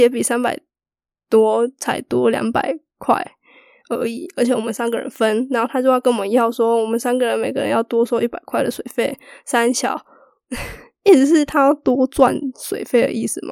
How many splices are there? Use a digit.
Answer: 0